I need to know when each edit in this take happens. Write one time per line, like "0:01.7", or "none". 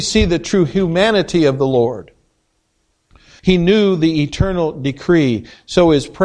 0:03.4